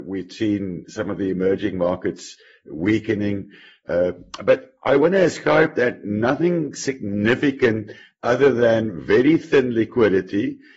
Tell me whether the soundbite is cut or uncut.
uncut